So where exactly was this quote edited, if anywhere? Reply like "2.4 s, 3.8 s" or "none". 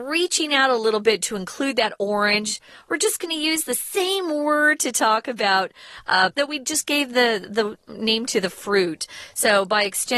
6.3 s